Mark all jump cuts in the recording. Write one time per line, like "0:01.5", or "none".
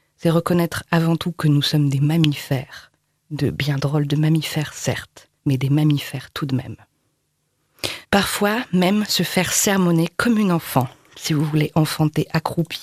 0:05.4
0:08.0